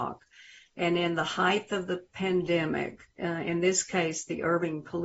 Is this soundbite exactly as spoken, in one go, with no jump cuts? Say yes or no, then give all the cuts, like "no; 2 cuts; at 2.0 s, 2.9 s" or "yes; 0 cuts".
no; 1 cut; at 3.2 s